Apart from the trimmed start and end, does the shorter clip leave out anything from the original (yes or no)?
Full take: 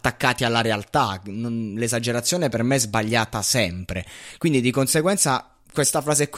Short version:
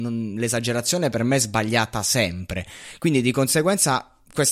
no